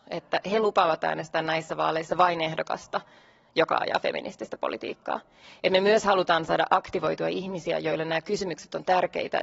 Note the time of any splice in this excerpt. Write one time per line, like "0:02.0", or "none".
none